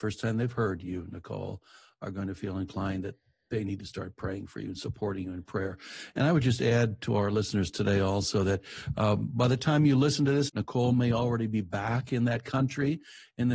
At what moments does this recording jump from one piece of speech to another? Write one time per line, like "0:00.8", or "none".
0:10.5